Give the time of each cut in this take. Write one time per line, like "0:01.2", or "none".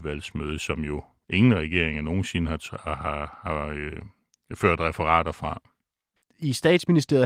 0:06.2